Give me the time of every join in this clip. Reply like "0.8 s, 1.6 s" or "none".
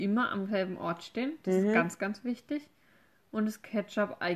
none

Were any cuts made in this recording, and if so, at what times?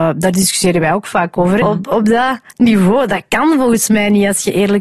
1.6 s

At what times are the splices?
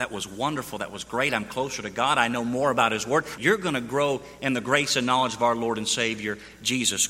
3.4 s

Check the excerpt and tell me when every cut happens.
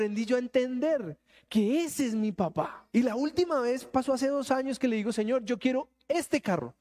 2.9 s

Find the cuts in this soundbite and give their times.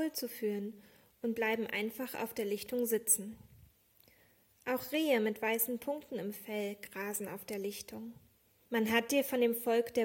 8.6 s

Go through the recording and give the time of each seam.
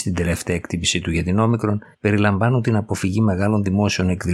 1.9 s

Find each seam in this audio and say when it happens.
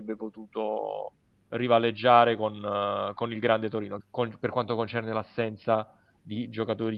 4.0 s

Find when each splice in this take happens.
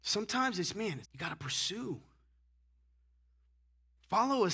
1.0 s

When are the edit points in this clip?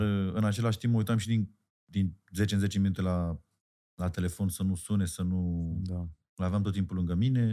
none

